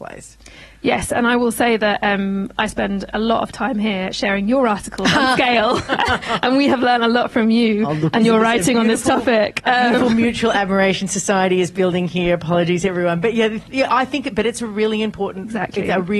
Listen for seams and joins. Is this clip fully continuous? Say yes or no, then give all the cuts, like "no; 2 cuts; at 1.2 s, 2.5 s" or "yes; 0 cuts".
yes; 0 cuts